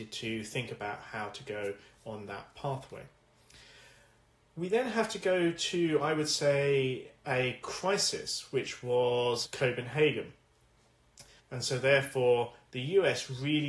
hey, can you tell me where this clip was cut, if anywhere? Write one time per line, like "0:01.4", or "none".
0:09.5
0:11.4